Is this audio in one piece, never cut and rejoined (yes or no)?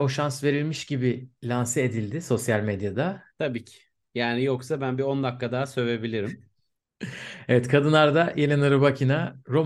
no